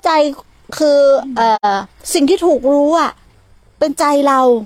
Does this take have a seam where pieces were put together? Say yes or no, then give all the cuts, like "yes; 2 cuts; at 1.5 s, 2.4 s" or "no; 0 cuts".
no; 0 cuts